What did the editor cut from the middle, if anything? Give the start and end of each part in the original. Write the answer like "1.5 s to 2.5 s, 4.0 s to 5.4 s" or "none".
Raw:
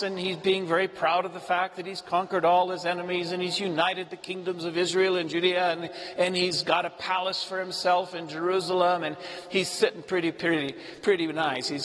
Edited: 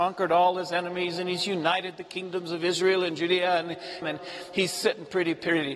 6.1 s to 9.0 s